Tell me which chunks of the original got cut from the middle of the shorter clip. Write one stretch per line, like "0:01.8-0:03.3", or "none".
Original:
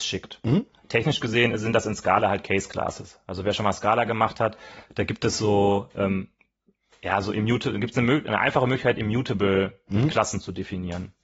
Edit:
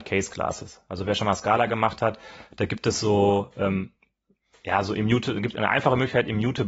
0:07.9-0:08.2